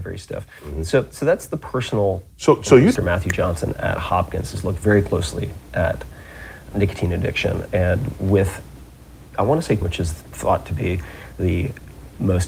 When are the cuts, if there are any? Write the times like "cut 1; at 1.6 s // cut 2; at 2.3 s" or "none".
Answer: cut 1; at 3.0 s // cut 2; at 6.7 s // cut 3; at 9.8 s